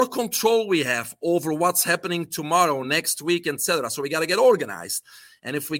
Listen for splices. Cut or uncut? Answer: uncut